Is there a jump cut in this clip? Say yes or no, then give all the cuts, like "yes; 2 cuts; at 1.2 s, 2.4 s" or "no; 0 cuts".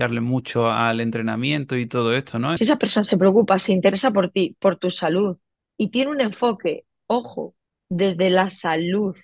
yes; 1 cut; at 2.6 s